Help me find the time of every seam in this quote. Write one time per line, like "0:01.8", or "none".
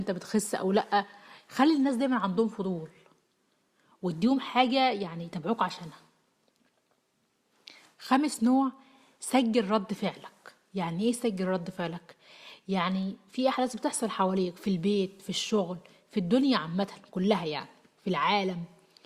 none